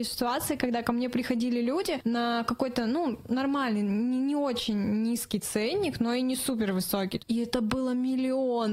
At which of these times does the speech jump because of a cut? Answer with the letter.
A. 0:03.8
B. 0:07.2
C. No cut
B